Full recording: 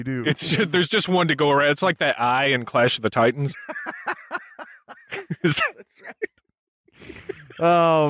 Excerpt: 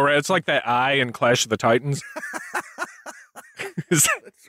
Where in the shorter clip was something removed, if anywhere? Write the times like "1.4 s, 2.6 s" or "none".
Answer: none